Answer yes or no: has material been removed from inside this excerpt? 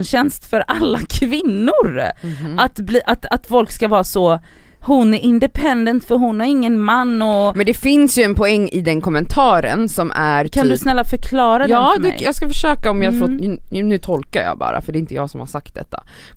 no